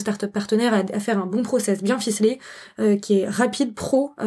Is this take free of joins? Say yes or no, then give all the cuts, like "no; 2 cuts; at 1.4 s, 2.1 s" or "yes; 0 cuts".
yes; 0 cuts